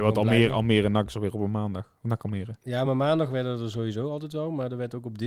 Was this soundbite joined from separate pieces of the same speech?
no; 0 cuts

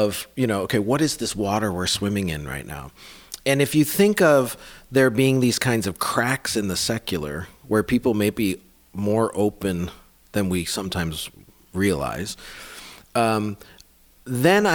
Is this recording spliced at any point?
no; 0 cuts

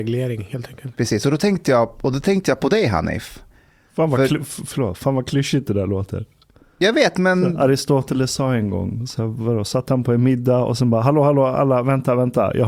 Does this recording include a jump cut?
no; 0 cuts

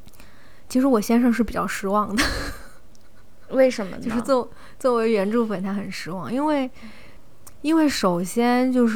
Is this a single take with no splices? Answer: yes; 0 cuts

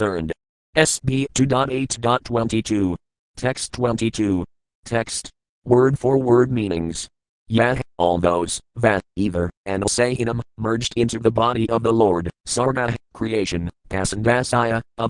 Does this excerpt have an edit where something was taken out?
yes; 1 cut; at 5.5 s

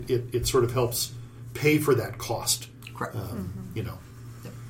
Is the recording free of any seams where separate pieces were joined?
yes; 0 cuts

